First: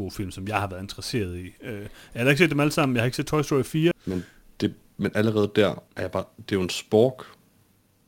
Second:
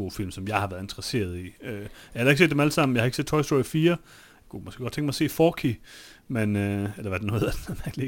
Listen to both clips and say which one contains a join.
first; 2 cuts; at 3.9 s, 5.9 s

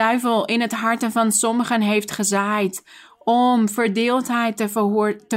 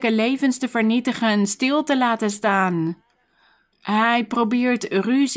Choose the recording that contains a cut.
second; 1 cut; at 3.7 s

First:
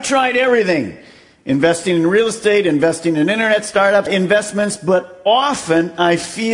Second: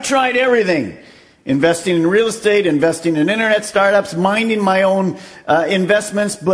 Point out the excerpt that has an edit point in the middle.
first; 1 cut; at 4.1 s

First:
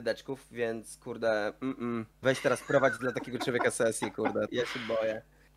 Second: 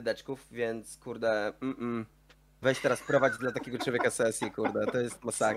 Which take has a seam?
first; 2 cuts; at 2.1 s, 4.5 s

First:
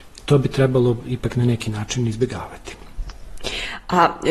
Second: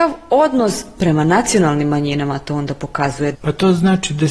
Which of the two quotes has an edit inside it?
second; 1 cut; at 3.3 s

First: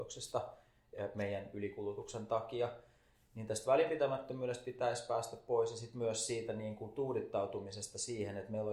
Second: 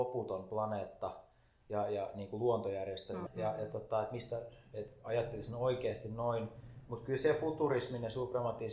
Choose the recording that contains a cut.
second; 1 cut; at 3.3 s

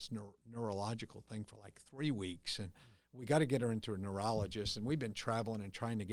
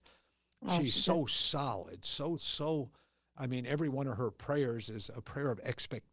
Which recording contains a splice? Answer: second; 1 cut; at 2.4 s

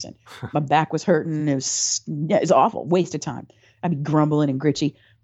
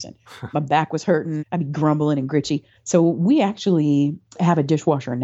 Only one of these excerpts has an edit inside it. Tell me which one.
second; 2 cuts; at 1.4 s, 2.8 s

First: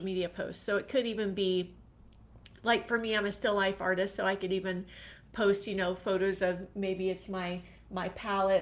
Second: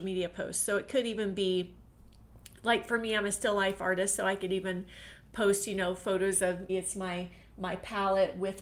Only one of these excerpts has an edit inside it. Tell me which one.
second; 1 cut; at 6.7 s

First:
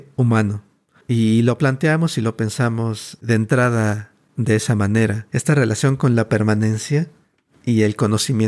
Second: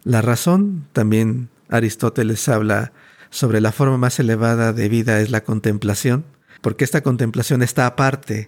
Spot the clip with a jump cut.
first; 1 cut; at 5.3 s

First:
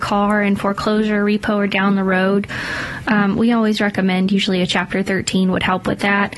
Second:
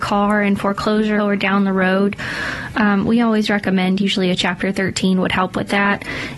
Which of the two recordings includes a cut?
second; 1 cut; at 1.2 s

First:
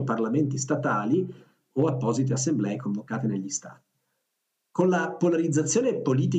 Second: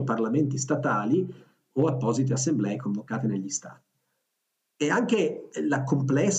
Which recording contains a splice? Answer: second; 1 cut; at 4.6 s

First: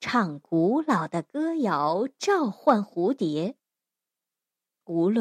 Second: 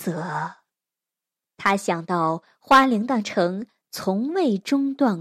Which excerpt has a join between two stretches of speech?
second; 1 cut; at 1.4 s

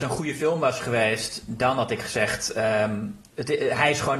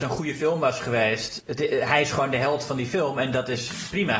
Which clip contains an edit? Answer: second; 1 cut; at 1.4 s

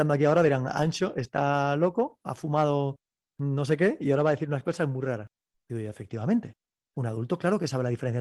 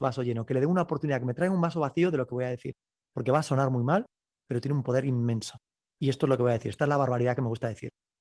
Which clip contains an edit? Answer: first; 1 cut; at 5.5 s

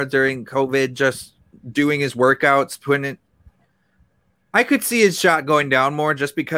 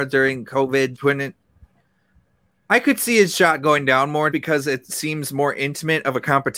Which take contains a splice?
second; 2 cuts; at 0.9 s, 4.3 s

